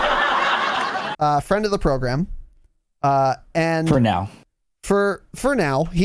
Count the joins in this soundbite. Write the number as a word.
one